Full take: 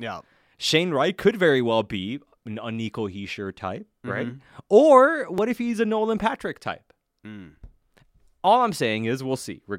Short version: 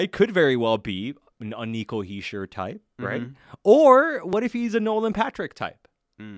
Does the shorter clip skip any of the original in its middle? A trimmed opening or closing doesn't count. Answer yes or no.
no